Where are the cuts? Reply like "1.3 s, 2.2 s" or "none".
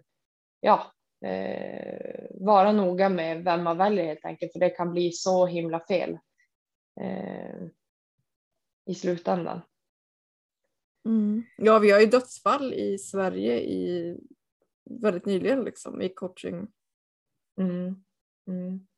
none